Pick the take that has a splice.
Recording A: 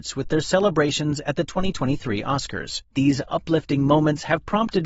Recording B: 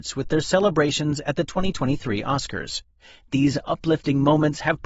A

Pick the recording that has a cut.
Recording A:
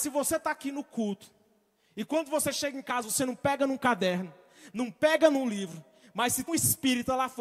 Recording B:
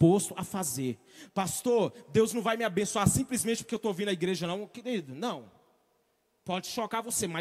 A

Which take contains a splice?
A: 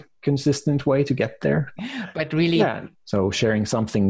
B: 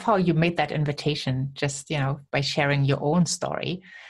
A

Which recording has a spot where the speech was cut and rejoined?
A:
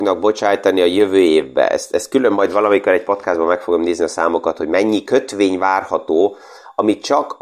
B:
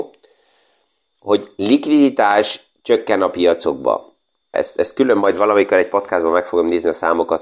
B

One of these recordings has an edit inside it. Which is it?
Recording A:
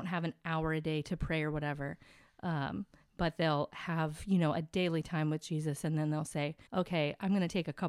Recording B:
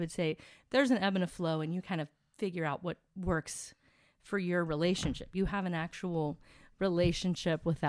A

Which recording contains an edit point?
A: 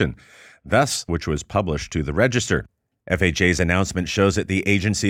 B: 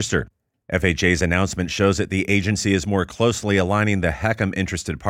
A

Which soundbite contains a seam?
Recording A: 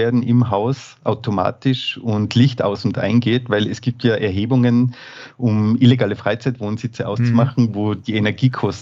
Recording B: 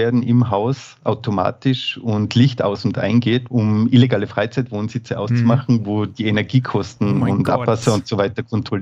B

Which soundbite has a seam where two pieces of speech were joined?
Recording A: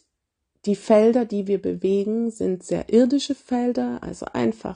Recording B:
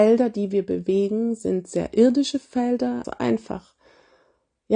B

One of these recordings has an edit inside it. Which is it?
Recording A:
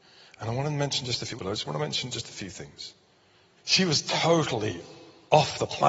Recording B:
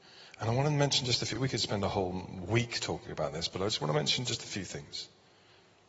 A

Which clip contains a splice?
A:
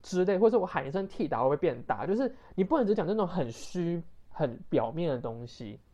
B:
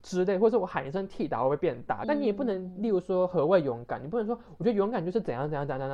B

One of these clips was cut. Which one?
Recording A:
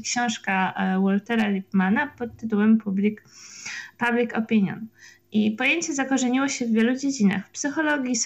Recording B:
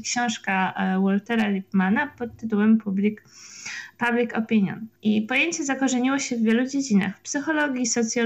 B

